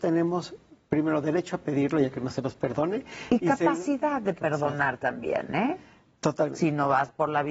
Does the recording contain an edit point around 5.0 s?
no; 0 cuts

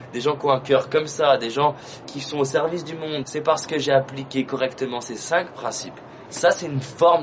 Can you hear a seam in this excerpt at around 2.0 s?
yes; 3 cuts; at 2.0 s, 3.2 s, 6.3 s

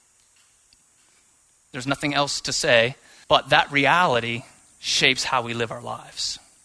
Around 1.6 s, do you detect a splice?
no; 1 cut; at 3.2 s

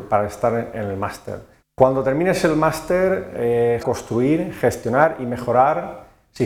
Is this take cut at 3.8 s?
yes; 2 cuts; at 1.6 s, 3.8 s

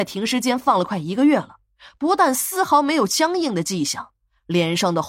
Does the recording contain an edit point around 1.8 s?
no; 0 cuts

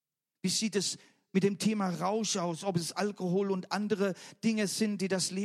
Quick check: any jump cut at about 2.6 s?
no; 0 cuts

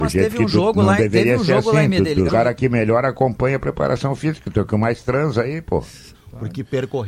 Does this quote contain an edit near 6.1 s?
yes; 2 cuts; at 2.3 s, 6.1 s

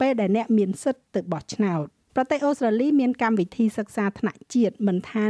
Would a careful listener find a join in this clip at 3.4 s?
no; 1 cut; at 2.1 s

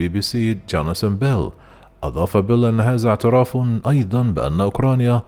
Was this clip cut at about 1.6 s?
no; 0 cuts

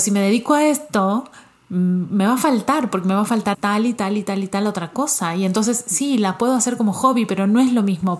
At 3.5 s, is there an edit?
yes; 1 cut; at 3.5 s

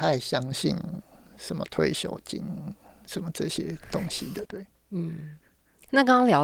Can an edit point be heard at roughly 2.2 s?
no; 1 cut; at 4.4 s

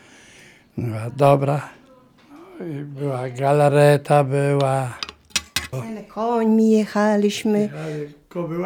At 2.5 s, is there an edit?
no; 1 cut; at 5.7 s

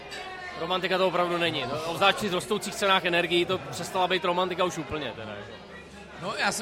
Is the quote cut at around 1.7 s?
no; 0 cuts

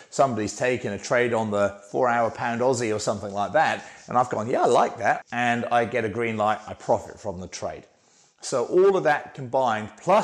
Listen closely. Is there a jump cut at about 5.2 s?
yes; 1 cut; at 5.2 s

